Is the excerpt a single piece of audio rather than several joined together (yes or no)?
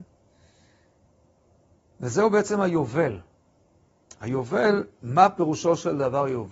yes